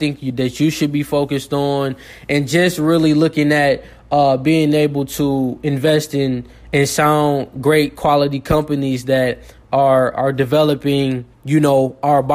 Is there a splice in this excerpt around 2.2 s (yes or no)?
no